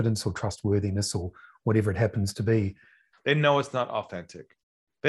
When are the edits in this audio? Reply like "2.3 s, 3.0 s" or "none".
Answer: 3.1 s